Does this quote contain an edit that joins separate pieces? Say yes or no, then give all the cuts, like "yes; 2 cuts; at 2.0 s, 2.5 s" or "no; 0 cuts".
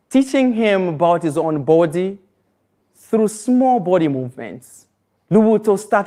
yes; 1 cut; at 5.1 s